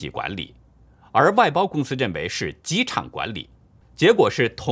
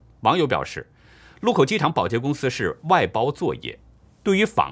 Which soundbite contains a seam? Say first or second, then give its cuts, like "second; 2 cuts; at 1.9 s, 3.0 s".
first; 1 cut; at 3.8 s